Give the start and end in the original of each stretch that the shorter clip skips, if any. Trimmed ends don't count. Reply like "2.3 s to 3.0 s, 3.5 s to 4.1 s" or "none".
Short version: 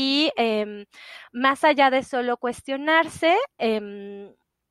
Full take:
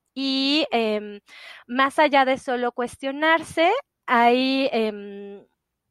3.9 s to 4.7 s